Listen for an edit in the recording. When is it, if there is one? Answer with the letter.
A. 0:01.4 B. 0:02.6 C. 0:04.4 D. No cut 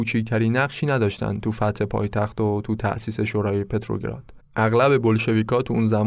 C